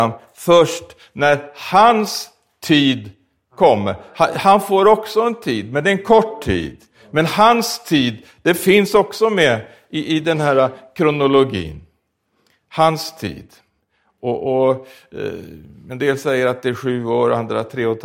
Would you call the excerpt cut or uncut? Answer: uncut